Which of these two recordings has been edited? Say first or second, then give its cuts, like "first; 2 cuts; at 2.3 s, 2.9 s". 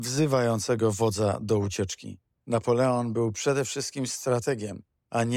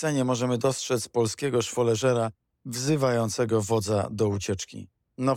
first; 1 cut; at 2.4 s